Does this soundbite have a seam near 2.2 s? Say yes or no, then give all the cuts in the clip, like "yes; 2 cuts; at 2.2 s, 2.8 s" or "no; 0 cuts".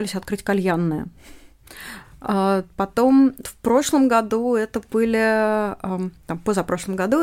no; 1 cut; at 3.4 s